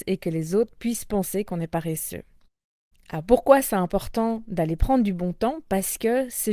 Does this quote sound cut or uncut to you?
uncut